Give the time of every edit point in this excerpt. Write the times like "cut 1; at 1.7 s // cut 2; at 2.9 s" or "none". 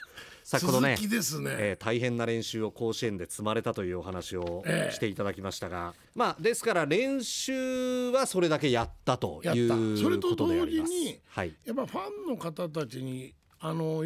none